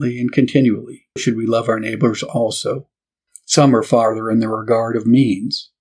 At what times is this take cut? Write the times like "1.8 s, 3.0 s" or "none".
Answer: 1.2 s, 3.3 s